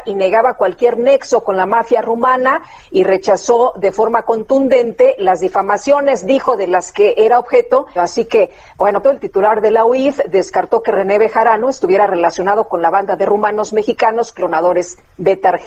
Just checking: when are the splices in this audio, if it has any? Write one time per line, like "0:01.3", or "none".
0:08.0
0:09.0